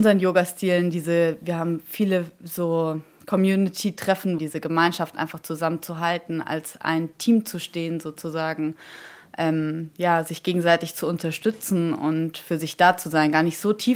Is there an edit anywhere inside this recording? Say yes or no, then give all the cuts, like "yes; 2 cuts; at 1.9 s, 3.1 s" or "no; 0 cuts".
yes; 1 cut; at 4.4 s